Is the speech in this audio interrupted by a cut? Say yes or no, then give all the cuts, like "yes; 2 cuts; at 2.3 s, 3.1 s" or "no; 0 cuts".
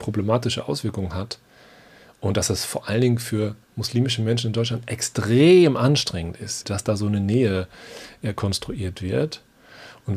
yes; 2 cuts; at 3.6 s, 6.6 s